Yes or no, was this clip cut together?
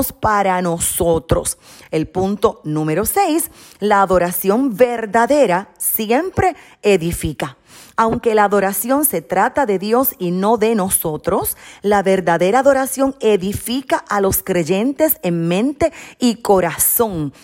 no